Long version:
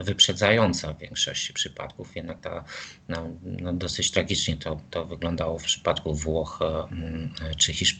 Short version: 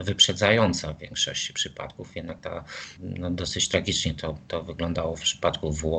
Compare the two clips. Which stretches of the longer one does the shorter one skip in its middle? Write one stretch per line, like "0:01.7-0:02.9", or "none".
0:03.0-0:03.4

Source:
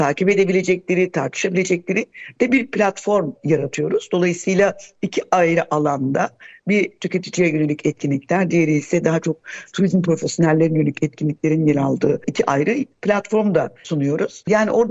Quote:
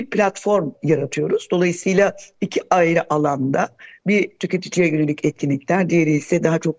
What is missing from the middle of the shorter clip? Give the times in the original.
none

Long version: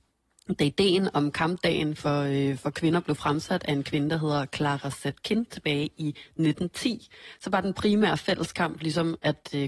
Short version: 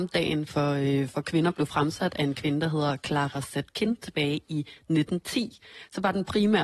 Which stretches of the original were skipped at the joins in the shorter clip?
none

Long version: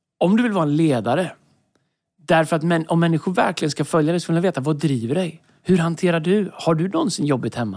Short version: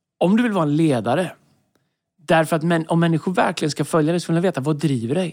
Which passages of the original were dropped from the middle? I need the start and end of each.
none

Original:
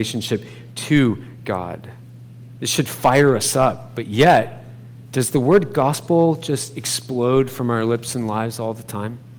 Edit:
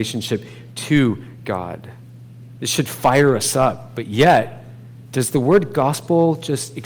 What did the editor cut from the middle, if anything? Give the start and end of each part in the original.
none

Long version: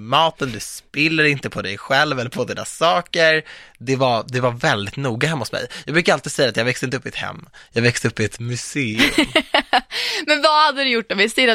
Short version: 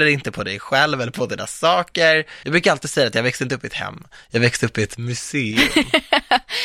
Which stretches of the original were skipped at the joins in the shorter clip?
0:03.6-0:05.8

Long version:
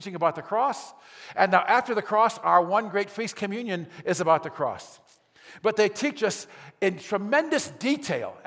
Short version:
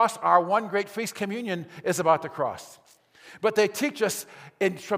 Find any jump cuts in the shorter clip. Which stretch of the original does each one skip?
none

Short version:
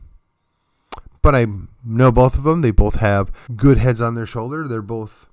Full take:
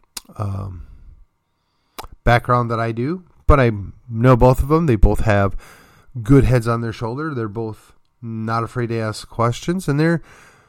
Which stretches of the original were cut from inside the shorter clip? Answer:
0:02.2-0:03.4
0:05.7-0:06.1

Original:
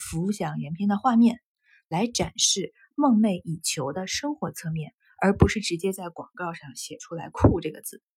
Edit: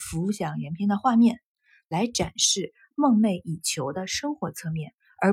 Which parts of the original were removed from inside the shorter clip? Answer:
none

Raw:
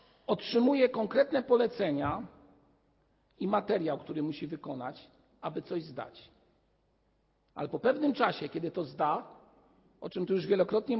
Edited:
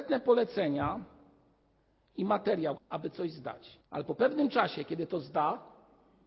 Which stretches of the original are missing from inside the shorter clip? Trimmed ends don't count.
0:04.0-0:05.3
0:06.3-0:07.4

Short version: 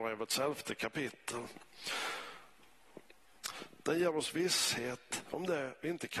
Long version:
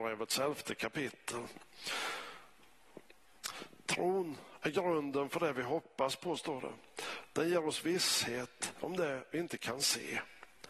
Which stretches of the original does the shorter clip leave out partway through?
0:03.8-0:07.3

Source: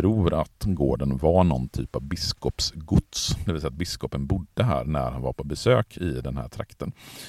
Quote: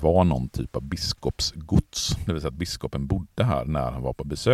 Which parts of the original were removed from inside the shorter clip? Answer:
none

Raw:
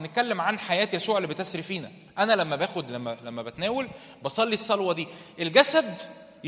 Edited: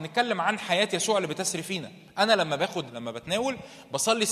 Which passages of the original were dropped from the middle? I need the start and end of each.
0:02.9-0:03.2

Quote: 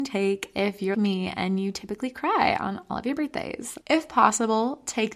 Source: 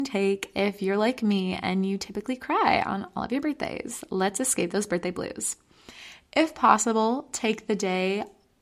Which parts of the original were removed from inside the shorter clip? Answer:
0:00.9-0:01.2
0:04.1-0:06.3

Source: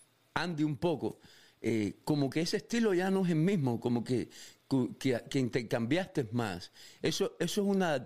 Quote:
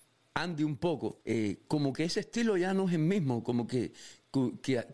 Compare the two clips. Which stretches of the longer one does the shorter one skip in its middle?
0:01.2-0:01.6

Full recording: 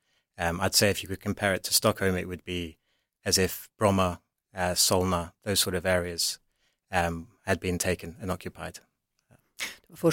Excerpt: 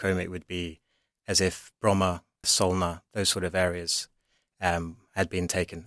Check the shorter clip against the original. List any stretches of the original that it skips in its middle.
0:04.4-0:04.7

